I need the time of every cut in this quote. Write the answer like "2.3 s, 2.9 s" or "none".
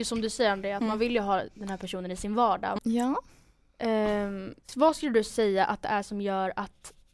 2.8 s, 4.6 s